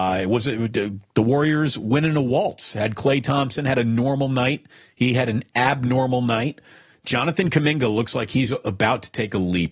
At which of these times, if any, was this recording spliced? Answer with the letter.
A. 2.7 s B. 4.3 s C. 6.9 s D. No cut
C